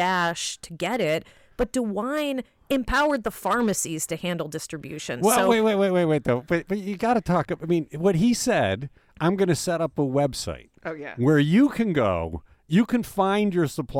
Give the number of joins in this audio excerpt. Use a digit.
0